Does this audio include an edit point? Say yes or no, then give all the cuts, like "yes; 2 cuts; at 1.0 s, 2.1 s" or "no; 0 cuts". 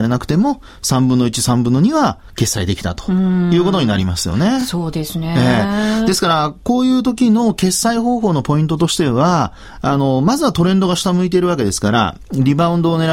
no; 0 cuts